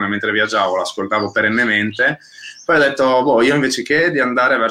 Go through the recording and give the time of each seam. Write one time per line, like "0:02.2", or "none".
none